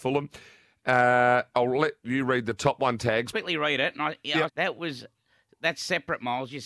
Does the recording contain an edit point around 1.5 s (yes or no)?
no